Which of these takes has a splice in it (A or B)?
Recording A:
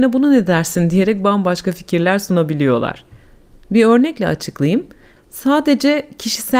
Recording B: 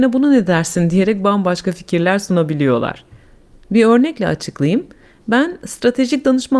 A